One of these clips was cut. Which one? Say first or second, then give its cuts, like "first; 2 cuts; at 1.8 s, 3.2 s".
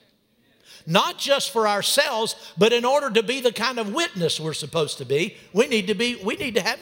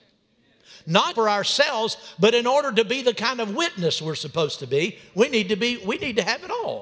second; 1 cut; at 1.1 s